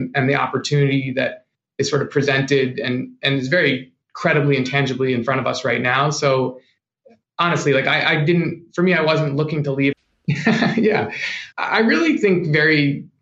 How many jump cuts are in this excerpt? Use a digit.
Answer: 2